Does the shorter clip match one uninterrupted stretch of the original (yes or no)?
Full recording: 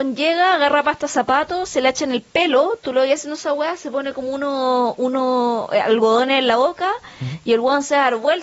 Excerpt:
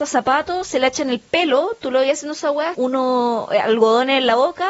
no